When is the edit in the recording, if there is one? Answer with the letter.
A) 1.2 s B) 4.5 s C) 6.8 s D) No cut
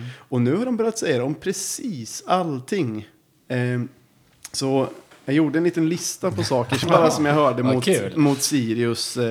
C